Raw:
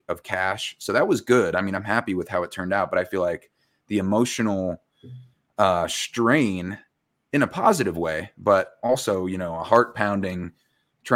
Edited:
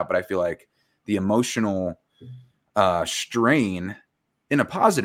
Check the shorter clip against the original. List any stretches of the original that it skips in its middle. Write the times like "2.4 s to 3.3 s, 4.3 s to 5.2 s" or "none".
none